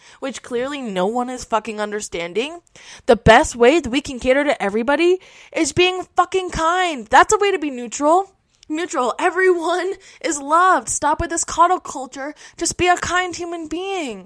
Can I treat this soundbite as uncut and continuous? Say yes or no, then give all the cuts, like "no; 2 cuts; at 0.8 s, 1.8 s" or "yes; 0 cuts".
yes; 0 cuts